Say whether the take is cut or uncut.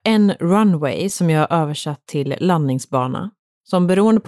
uncut